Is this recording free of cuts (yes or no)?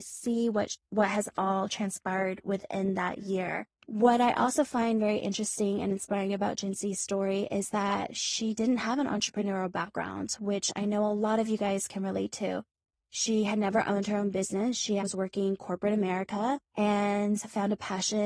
no